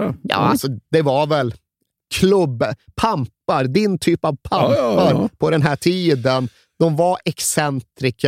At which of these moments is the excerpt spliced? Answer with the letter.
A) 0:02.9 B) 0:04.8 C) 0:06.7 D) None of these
D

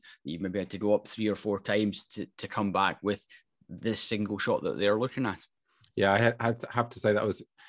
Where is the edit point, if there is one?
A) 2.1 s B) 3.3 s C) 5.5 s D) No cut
D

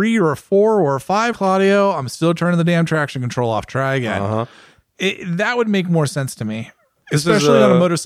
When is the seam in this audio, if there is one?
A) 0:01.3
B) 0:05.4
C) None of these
A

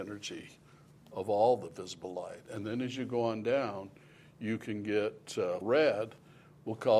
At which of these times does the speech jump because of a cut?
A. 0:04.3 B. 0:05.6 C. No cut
B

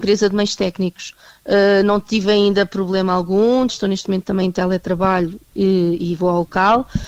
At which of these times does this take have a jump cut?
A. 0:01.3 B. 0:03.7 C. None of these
B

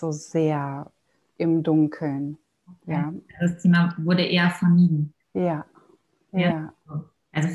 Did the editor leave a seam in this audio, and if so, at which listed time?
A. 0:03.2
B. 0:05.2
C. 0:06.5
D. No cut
B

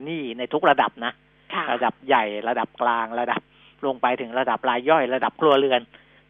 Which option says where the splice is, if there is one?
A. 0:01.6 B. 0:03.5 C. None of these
C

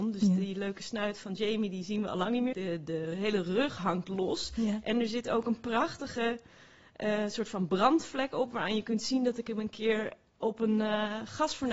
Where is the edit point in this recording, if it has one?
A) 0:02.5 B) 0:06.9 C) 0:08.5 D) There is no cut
A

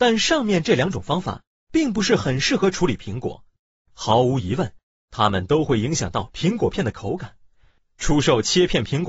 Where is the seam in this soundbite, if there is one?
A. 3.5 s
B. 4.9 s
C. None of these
C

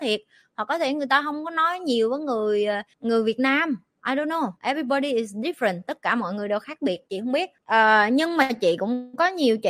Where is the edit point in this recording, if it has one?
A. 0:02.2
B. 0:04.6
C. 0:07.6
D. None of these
B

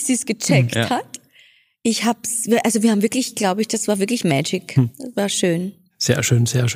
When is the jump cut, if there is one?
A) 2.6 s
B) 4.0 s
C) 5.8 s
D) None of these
D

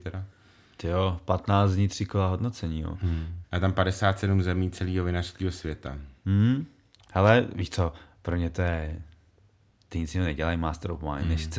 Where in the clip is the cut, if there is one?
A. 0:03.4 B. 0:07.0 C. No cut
A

